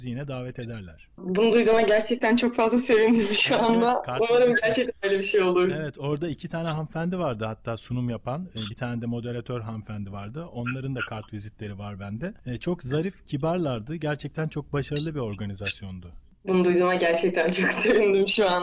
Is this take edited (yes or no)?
no